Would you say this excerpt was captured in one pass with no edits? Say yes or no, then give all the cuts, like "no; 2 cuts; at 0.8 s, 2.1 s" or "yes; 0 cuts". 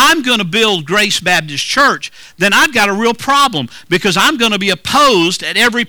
yes; 0 cuts